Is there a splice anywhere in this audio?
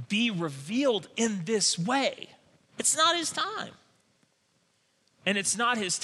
no; 0 cuts

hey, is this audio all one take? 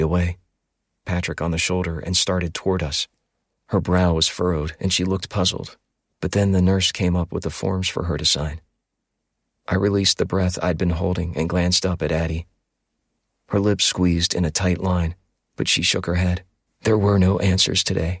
no; 2 cuts; at 1.0 s, 16.7 s

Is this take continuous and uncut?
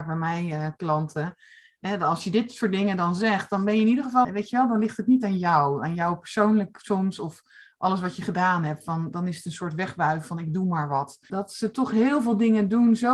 no; 2 cuts; at 4.2 s, 11.3 s

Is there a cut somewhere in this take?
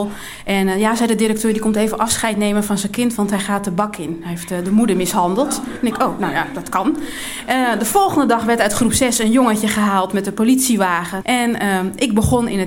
yes; 1 cut; at 11.2 s

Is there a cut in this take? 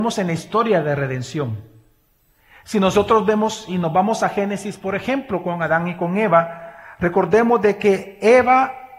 no; 0 cuts

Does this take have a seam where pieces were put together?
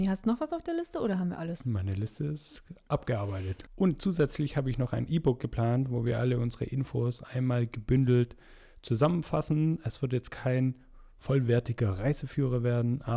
yes; 1 cut; at 3.7 s

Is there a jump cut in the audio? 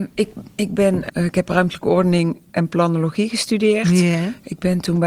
yes; 1 cut; at 1.1 s

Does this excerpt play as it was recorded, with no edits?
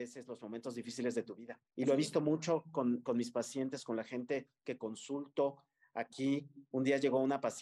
no; 1 cut; at 1.7 s

